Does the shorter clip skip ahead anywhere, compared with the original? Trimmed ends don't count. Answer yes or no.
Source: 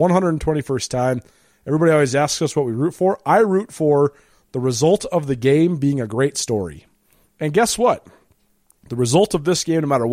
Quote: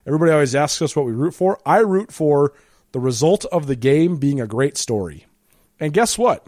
no